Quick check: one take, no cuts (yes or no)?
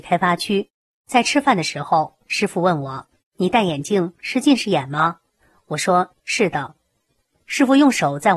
no